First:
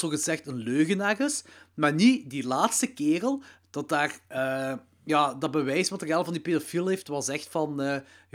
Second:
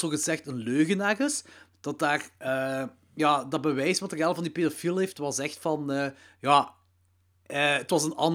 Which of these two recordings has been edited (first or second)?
second